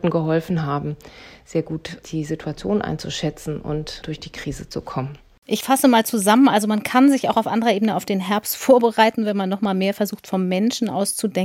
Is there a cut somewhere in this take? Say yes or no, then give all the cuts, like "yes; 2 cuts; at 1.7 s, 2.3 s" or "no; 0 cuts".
no; 0 cuts